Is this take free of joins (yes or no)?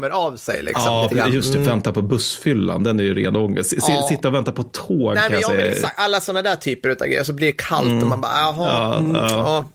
yes